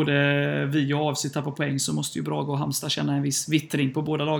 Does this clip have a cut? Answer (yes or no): no